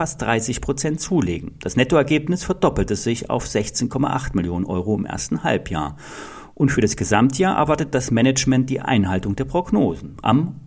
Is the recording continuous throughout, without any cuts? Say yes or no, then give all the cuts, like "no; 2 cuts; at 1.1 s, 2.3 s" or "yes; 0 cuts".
yes; 0 cuts